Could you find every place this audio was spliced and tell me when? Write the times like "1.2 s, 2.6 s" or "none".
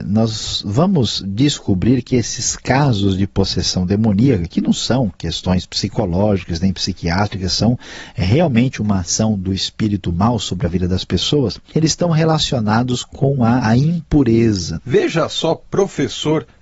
13.6 s, 14.8 s